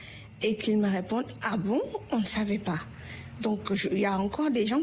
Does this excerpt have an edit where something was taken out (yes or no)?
no